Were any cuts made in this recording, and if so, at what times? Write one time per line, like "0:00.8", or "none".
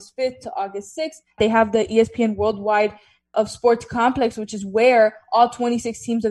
0:01.4
0:03.3